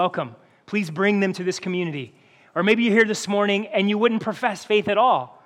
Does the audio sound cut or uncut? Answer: uncut